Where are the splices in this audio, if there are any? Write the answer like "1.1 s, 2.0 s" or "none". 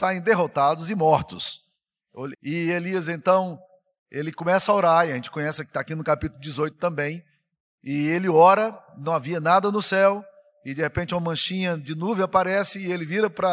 2.3 s